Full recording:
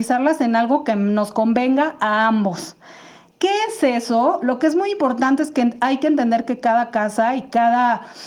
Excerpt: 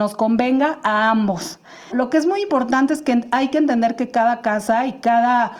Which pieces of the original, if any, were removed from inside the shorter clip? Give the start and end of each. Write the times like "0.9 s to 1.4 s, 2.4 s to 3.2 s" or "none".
3.1 s to 4.4 s